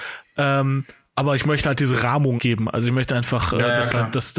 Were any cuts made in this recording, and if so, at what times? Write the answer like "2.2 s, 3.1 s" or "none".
2.4 s